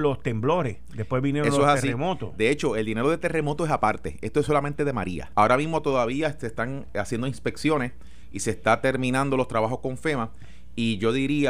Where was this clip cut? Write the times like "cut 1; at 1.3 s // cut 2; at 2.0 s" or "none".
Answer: cut 1; at 5.3 s // cut 2; at 6.9 s

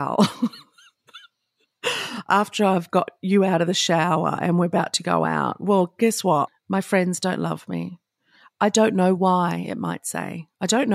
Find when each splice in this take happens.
cut 1; at 6.5 s

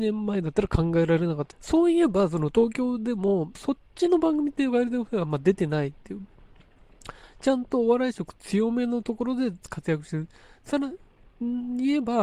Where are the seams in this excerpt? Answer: cut 1; at 1.5 s // cut 2; at 3.6 s

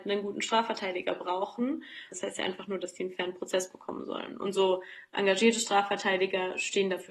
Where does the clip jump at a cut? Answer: cut 1; at 2.1 s

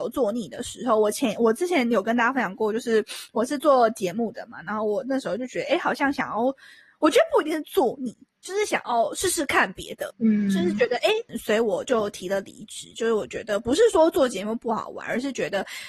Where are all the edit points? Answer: cut 1; at 11.3 s

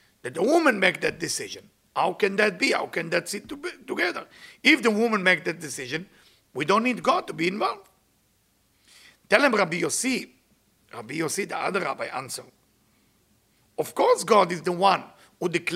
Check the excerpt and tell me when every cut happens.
none

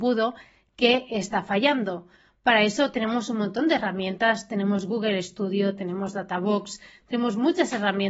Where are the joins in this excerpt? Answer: none

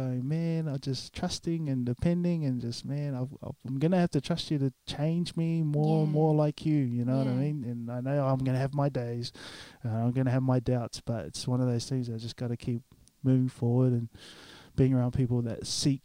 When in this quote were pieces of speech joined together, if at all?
none

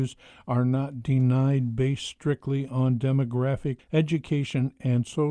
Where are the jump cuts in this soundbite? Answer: cut 1; at 3.8 s

